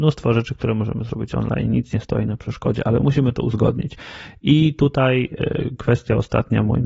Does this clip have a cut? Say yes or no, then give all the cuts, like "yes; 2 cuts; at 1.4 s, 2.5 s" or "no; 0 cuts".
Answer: no; 0 cuts